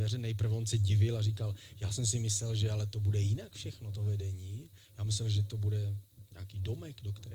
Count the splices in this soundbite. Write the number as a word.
zero